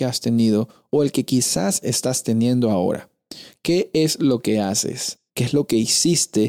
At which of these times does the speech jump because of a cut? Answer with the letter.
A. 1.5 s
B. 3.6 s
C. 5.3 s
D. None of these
C